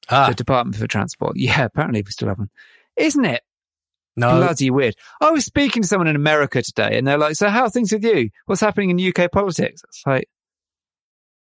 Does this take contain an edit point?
yes; 1 cut; at 1.4 s

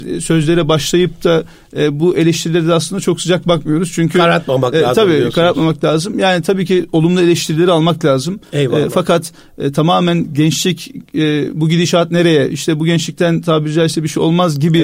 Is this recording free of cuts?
yes; 0 cuts

